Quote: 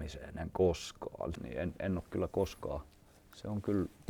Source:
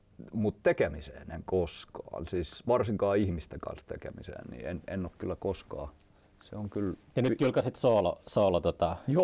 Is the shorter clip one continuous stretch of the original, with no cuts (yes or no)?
no